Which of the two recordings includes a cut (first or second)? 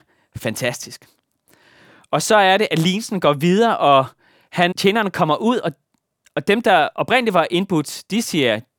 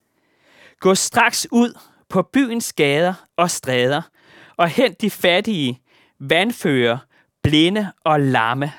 first